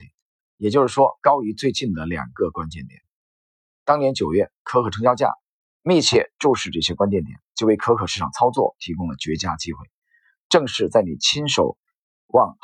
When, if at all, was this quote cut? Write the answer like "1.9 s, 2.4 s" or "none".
5.8 s